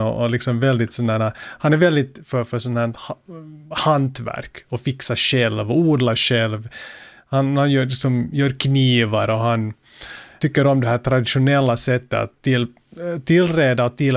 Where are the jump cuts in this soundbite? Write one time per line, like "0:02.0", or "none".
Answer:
0:10.4